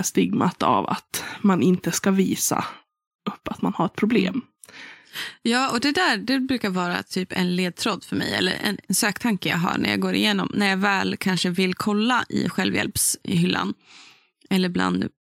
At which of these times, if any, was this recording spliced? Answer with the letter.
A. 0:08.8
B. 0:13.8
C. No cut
A